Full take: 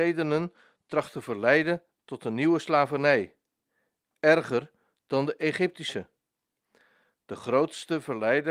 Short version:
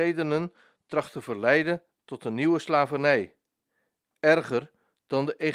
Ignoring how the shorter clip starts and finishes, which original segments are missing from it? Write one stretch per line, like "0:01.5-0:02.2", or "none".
none